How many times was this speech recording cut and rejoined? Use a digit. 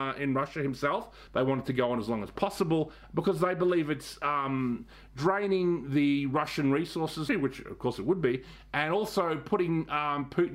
2